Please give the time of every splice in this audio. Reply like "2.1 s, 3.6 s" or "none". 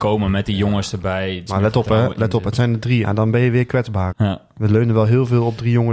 1.5 s, 3.0 s, 4.1 s